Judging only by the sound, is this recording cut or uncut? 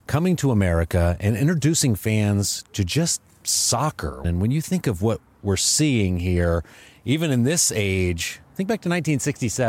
cut